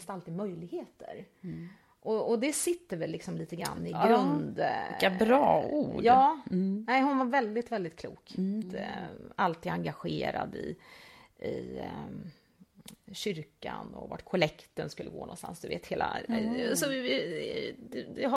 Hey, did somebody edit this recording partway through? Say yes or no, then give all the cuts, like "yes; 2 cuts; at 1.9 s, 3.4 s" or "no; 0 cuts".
yes; 1 cut; at 8.6 s